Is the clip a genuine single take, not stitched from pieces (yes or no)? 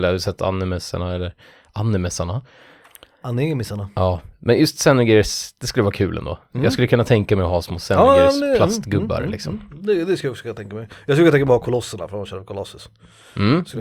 yes